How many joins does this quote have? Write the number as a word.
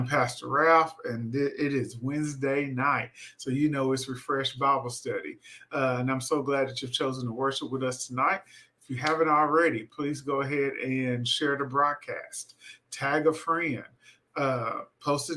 zero